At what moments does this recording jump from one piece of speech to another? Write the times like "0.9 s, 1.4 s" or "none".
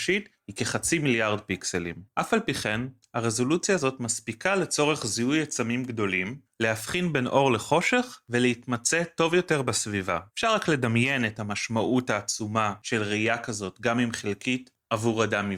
10.3 s